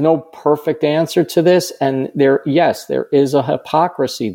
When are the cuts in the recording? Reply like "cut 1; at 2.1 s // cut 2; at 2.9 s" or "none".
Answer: none